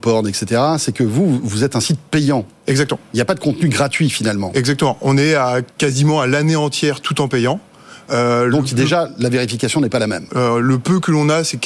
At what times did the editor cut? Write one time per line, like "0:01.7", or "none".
0:05.7
0:10.3